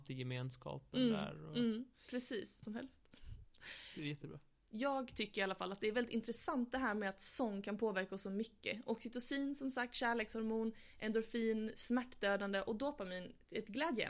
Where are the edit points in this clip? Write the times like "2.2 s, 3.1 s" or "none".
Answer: 2.6 s